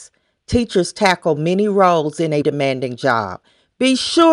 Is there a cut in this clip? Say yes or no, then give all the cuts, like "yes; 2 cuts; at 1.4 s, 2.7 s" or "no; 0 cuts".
yes; 1 cut; at 2.4 s